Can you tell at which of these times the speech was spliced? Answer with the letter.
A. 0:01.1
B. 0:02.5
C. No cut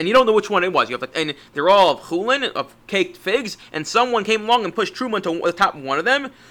A